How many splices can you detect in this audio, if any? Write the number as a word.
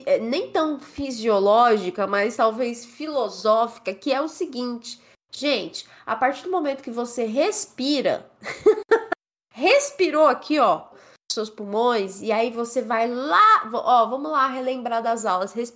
one